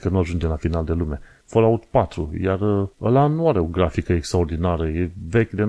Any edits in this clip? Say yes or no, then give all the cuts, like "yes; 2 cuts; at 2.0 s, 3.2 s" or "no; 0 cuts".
yes; 2 cuts; at 1.4 s, 2.9 s